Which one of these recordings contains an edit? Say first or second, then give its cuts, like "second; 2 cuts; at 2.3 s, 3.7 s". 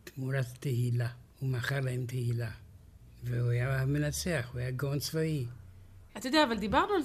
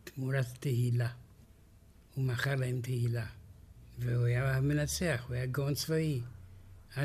first; 2 cuts; at 1.3 s, 6.1 s